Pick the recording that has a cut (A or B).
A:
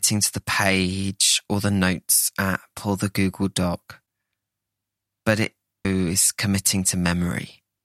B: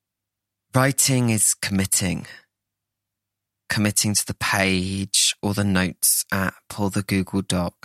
A